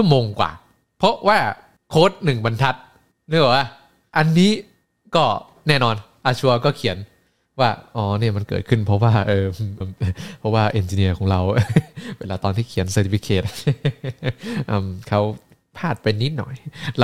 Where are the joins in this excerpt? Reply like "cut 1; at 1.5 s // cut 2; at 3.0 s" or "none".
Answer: cut 1; at 9.8 s